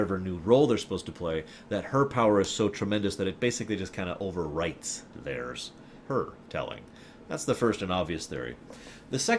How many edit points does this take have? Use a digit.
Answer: 1